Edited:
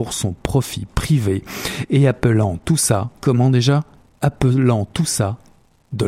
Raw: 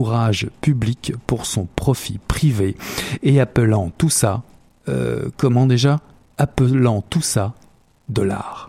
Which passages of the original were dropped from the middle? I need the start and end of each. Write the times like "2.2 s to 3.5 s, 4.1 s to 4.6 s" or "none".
4.5 s to 5.3 s